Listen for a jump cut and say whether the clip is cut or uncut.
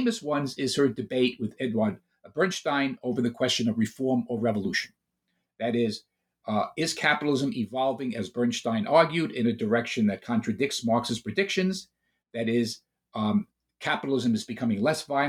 uncut